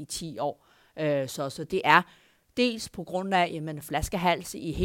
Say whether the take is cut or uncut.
uncut